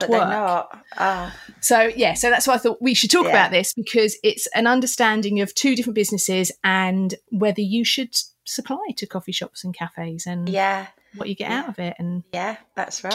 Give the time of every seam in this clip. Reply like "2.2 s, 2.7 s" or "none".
none